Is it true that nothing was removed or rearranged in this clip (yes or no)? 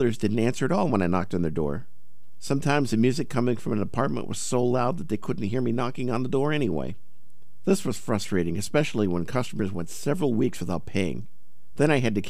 yes